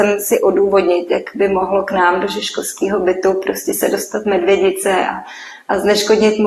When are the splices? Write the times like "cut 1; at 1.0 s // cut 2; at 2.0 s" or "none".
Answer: none